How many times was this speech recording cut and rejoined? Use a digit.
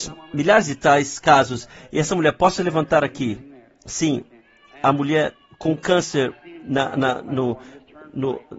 0